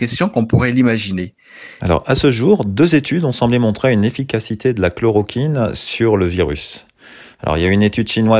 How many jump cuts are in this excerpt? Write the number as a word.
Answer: one